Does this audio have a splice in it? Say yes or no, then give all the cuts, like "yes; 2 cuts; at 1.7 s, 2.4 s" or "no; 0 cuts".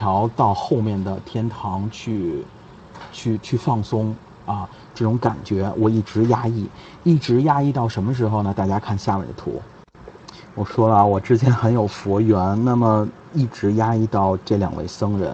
no; 0 cuts